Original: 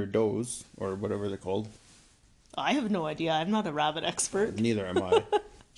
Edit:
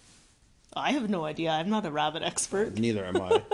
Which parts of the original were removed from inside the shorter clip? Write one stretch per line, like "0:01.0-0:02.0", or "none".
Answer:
none